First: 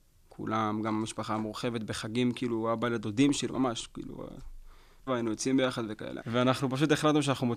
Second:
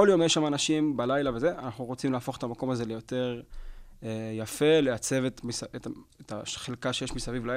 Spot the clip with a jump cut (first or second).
first